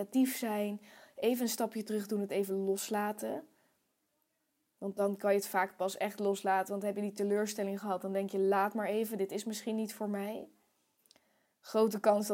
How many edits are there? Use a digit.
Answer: 0